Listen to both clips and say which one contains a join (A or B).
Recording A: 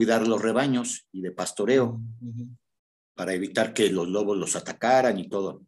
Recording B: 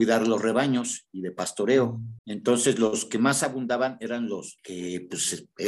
B